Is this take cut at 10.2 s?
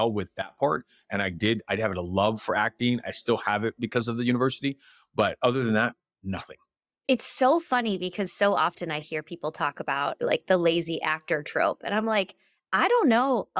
yes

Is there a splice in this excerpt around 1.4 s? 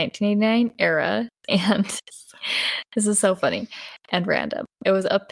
yes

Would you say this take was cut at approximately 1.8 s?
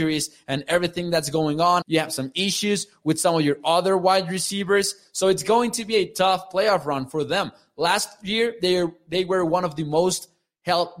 yes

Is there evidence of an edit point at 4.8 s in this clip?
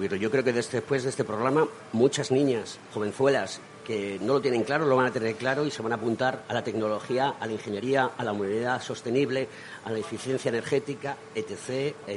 no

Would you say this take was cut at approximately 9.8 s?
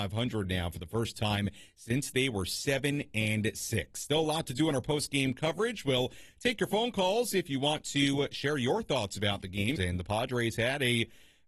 yes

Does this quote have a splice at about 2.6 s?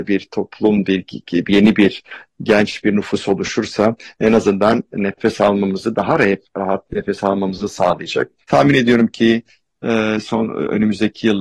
no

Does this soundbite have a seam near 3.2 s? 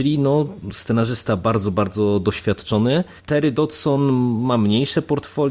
yes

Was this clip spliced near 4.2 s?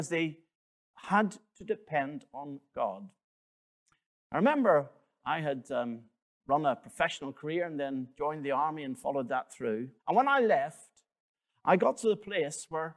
no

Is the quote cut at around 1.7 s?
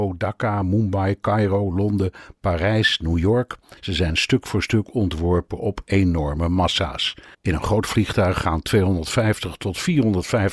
no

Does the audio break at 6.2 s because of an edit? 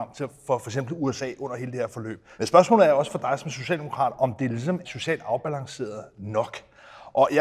no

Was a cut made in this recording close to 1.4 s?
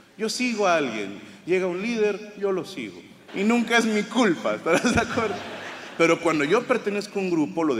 no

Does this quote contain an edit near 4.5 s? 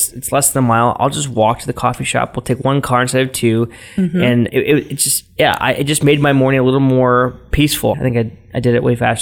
yes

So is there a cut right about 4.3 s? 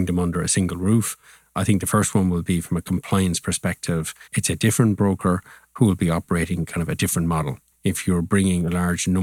yes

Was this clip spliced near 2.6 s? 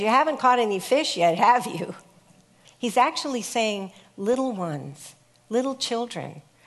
yes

